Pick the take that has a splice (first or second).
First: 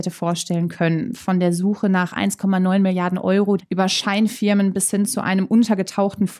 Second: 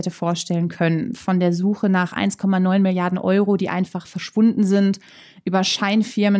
first